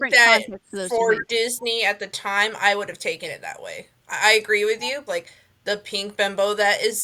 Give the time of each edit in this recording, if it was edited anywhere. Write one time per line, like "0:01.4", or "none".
0:04.0
0:05.1